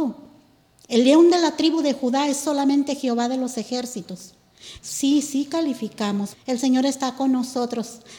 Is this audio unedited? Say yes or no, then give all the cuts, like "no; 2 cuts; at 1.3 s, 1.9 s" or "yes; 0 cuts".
no; 2 cuts; at 4.8 s, 6.3 s